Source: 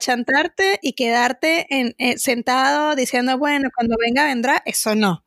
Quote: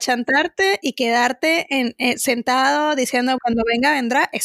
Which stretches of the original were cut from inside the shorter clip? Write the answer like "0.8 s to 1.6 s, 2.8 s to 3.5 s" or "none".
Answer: 3.4 s to 3.7 s